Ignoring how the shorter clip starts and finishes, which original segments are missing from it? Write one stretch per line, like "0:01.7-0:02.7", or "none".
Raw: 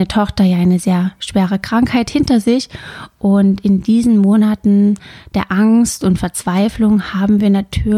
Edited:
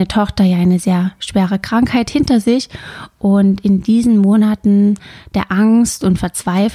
none